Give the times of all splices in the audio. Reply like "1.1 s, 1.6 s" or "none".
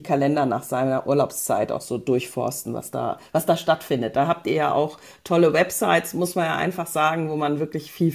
none